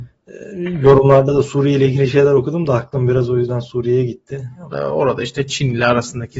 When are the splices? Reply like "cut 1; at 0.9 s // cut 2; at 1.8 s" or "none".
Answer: cut 1; at 4.7 s